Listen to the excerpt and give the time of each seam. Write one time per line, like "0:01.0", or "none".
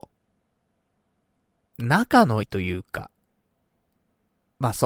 0:02.4

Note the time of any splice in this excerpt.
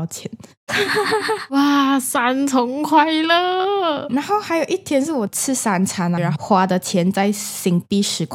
0:04.1
0:06.2

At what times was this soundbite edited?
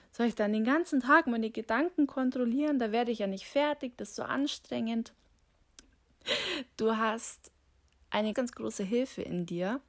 0:05.8
0:08.3

